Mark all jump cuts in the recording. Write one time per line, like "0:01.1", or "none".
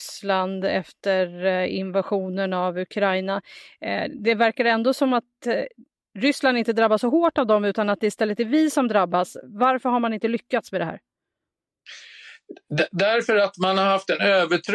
none